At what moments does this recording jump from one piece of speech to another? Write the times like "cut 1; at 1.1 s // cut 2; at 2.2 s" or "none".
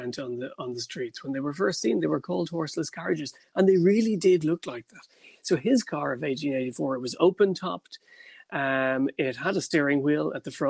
none

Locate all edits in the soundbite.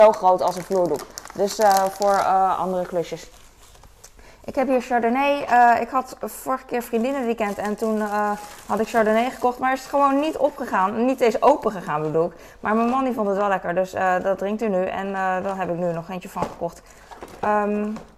none

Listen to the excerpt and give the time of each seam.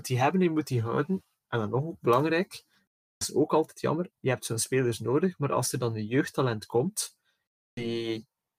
none

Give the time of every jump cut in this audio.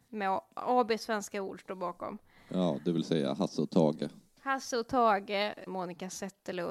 cut 1; at 5.7 s

